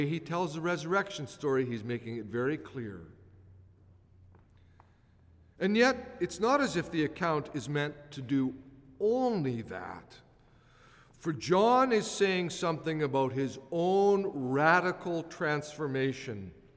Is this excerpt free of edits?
yes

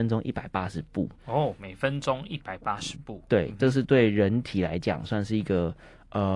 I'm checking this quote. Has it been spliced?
yes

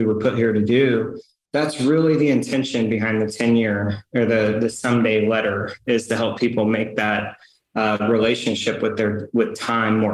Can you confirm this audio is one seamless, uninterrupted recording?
yes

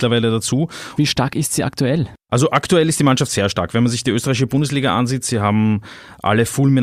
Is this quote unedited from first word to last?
no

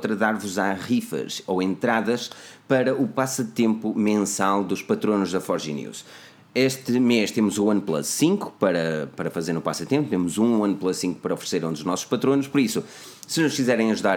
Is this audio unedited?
yes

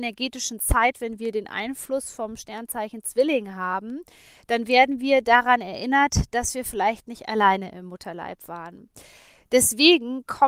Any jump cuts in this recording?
no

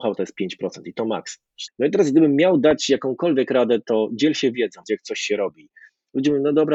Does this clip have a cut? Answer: yes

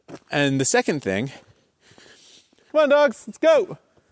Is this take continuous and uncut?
no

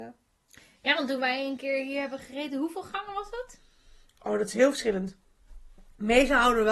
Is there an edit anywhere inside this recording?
no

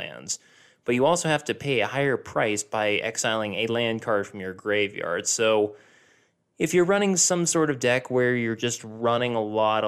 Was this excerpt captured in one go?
yes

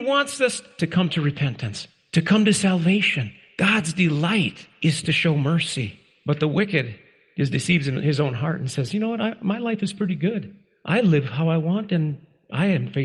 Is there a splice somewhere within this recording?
no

